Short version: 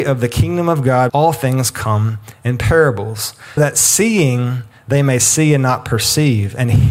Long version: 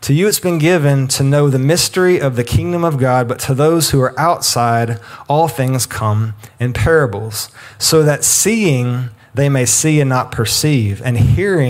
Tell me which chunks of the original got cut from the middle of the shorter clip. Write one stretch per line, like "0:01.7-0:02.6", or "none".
0:03.2-0:05.2
0:07.7-0:08.0

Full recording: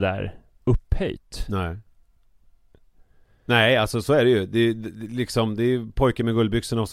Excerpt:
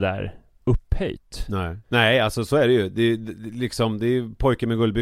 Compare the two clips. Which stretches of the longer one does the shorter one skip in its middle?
0:01.8-0:03.4

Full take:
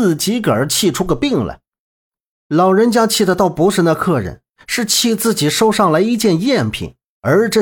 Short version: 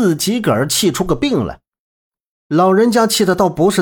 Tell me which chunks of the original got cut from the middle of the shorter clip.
none

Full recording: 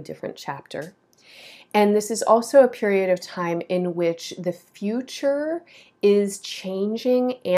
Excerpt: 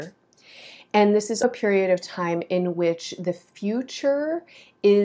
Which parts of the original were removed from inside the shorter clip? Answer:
0:02.2-0:02.6

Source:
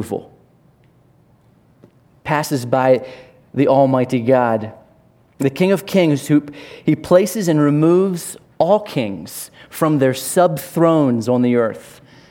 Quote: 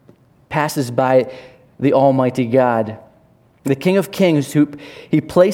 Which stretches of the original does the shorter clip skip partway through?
none

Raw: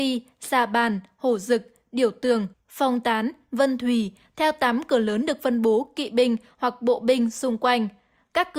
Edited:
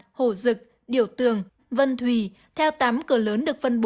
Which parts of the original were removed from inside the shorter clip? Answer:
0:02.6-0:03.4

